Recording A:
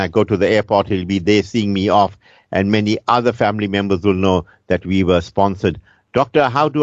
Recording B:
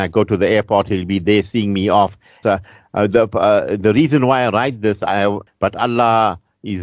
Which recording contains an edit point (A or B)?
B